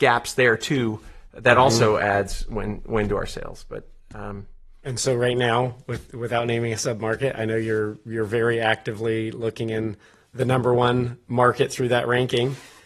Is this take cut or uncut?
uncut